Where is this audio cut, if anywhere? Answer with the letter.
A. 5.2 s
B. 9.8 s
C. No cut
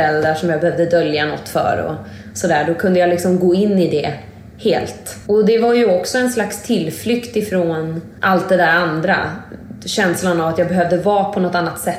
C